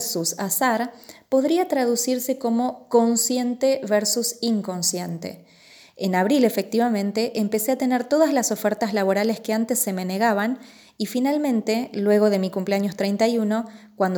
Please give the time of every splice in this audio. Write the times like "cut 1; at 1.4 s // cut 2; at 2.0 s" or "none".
cut 1; at 5.8 s

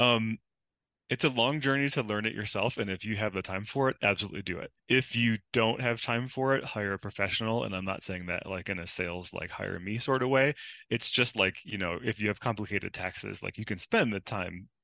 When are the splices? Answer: cut 1; at 4.8 s

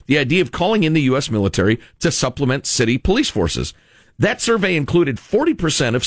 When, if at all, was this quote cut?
none

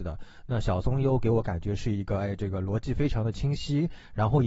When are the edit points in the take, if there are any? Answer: none

